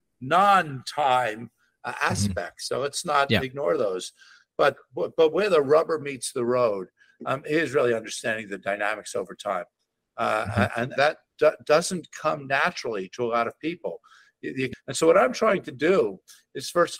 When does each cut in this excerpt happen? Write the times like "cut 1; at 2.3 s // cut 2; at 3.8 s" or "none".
cut 1; at 11.0 s // cut 2; at 14.7 s